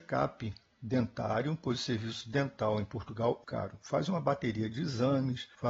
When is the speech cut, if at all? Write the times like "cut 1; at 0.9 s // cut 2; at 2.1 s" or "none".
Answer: cut 1; at 3.4 s